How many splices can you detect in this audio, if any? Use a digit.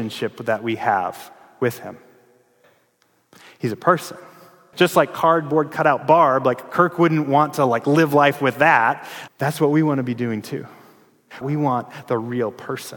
3